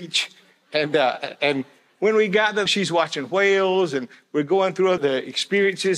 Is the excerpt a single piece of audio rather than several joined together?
no; 2 cuts; at 2.7 s, 5.0 s

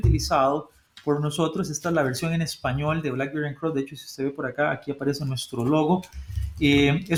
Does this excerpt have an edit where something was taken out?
no; 0 cuts

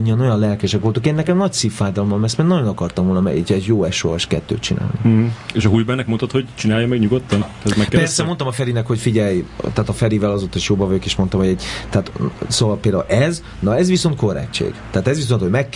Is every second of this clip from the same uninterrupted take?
yes; 0 cuts

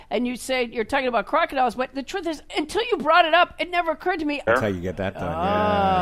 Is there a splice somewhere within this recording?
yes; 2 cuts; at 2.5 s, 4.5 s

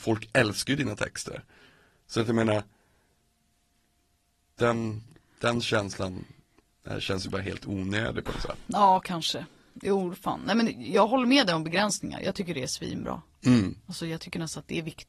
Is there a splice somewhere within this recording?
no; 0 cuts

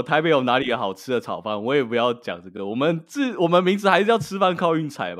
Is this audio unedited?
yes; 0 cuts

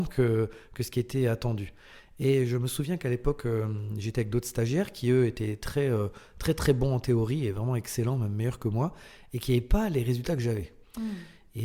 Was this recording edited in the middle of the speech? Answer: no; 0 cuts

